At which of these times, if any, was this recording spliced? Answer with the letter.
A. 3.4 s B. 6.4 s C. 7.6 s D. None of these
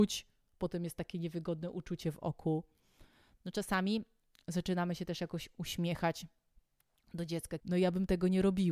C